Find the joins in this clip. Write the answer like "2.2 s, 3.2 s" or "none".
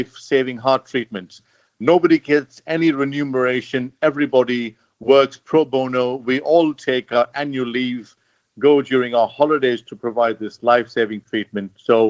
none